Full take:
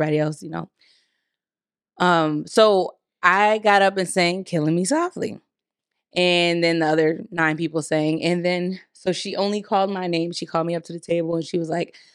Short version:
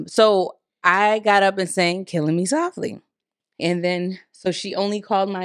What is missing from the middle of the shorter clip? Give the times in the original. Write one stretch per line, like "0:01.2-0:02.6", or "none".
0:06.0-0:08.2